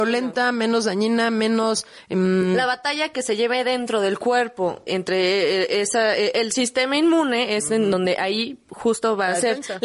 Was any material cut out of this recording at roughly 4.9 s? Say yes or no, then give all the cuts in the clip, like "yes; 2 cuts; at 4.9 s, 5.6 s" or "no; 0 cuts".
yes; 1 cut; at 4.9 s